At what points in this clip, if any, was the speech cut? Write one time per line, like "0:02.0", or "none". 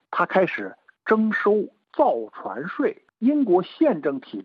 0:03.1